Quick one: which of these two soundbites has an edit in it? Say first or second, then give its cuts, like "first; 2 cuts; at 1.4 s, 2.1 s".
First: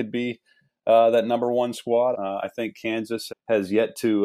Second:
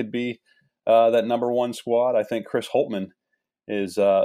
first; 2 cuts; at 2.1 s, 3.3 s